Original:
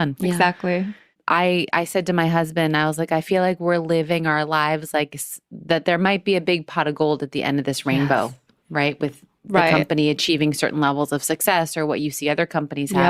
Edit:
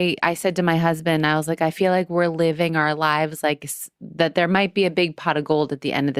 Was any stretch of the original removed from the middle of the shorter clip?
no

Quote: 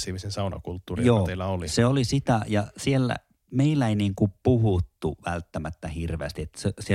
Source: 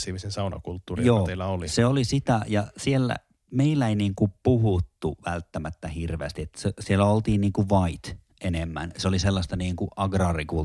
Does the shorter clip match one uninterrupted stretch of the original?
yes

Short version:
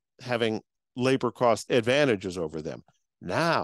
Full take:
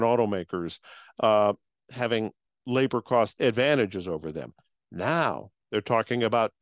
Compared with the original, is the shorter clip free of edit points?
yes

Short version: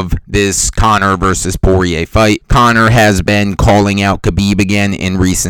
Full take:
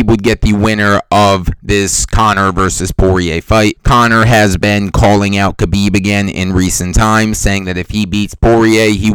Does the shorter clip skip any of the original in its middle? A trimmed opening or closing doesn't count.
no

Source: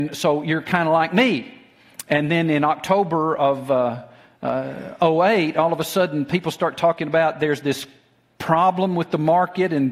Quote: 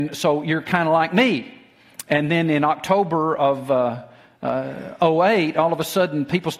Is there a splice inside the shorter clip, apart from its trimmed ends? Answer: no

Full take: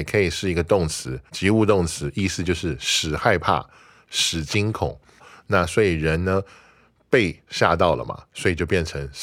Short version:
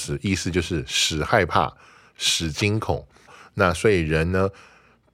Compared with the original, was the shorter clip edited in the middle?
no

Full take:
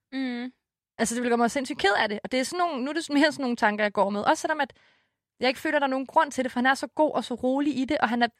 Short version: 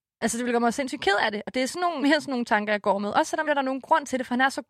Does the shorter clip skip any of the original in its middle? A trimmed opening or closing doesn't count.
yes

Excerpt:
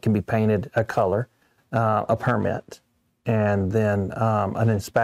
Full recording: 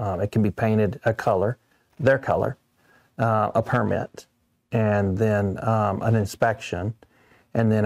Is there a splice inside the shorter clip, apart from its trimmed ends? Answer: yes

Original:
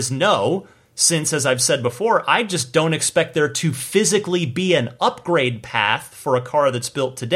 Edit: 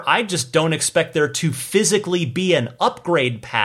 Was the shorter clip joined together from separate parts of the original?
no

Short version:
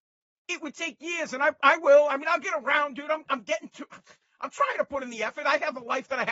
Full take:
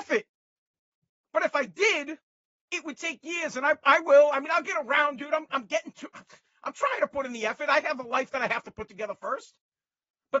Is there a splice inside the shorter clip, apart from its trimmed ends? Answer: no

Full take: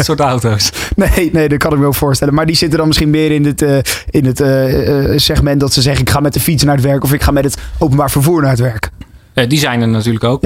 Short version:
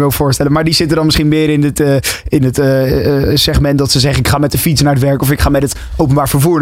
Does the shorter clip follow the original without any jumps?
yes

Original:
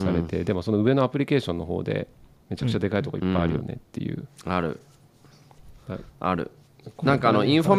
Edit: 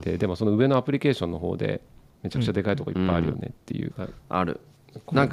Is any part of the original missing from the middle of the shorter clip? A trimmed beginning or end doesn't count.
yes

